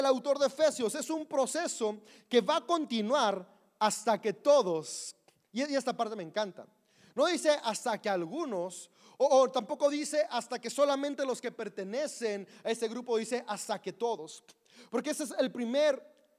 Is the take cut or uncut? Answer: uncut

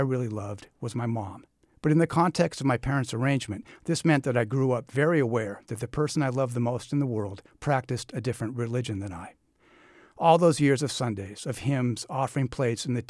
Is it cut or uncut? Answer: uncut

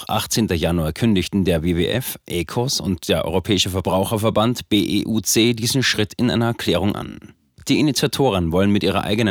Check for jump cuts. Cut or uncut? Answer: uncut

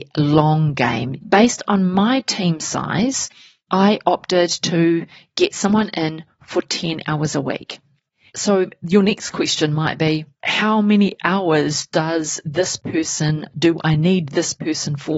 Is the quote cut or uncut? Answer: cut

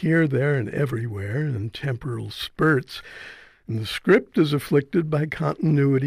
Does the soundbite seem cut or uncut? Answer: uncut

